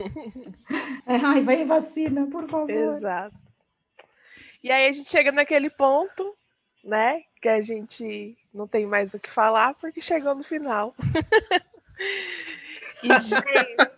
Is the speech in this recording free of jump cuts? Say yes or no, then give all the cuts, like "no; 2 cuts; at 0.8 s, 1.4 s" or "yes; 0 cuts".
yes; 0 cuts